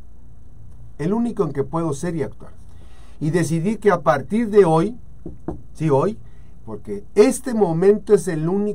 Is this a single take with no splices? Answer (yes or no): no